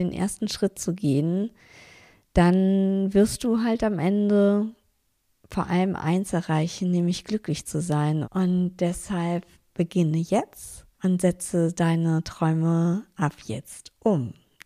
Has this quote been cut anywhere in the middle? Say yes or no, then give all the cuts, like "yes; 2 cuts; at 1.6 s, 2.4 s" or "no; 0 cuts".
yes; 2 cuts; at 8.2 s, 10.9 s